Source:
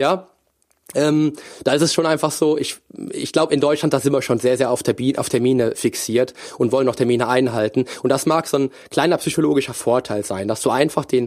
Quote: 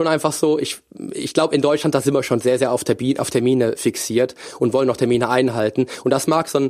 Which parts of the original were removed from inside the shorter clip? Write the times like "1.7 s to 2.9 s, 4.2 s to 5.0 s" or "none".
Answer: none

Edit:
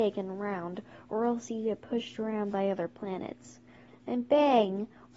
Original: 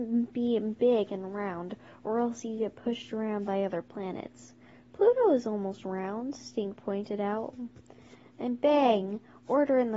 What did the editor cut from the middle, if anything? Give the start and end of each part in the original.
4.8 s to 8.2 s

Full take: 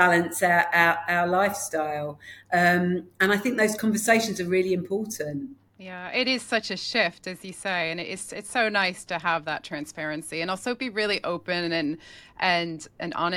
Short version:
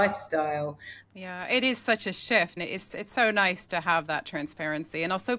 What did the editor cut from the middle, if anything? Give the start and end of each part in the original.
2.4 s to 5.7 s, 7.2 s to 7.9 s

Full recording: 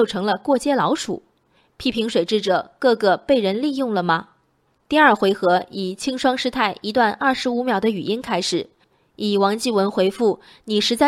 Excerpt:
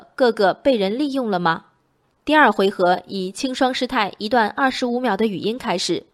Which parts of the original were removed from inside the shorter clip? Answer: none

